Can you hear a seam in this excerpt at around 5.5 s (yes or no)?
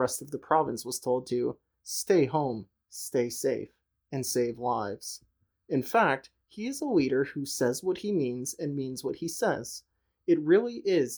yes